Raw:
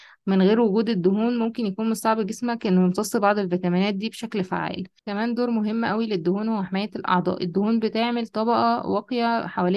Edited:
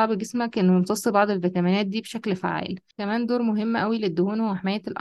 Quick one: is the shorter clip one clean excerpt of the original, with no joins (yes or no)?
yes